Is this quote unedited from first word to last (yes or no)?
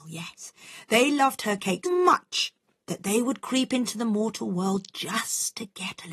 no